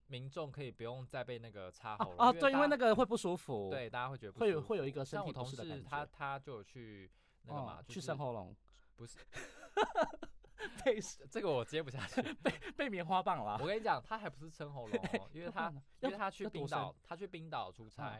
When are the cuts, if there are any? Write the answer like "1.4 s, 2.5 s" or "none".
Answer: none